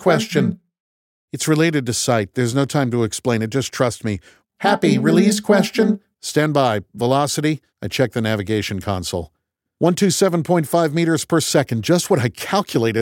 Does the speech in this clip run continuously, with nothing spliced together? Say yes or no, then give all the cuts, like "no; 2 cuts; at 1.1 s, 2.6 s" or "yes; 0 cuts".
no; 2 cuts; at 4.4 s, 7.7 s